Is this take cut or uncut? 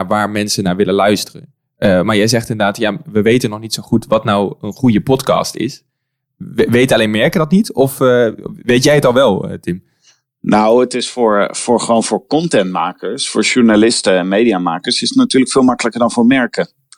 uncut